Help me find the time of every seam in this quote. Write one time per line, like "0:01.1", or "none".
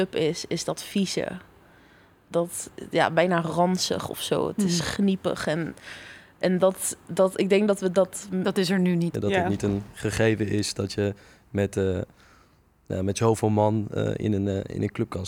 0:09.1